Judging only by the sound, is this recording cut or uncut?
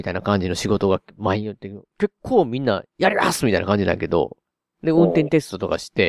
uncut